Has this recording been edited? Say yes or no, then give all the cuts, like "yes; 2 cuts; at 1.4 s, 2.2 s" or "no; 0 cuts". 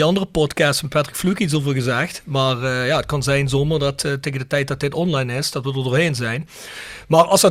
yes; 1 cut; at 5.5 s